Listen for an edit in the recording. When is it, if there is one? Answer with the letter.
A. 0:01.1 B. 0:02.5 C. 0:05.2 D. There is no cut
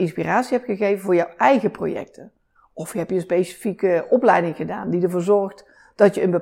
B